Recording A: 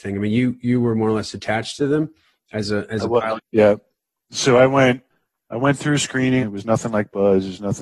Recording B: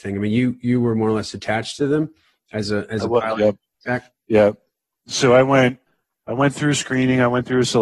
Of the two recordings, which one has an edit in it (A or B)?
A